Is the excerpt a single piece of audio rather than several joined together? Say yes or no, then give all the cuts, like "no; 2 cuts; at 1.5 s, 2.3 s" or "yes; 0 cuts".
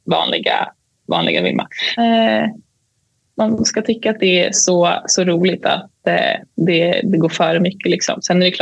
no; 1 cut; at 2.0 s